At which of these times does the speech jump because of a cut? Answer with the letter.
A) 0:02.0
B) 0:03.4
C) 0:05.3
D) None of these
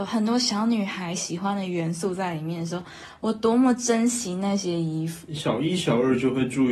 C